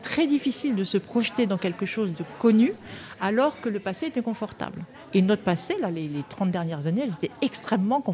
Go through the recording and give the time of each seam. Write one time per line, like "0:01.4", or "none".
none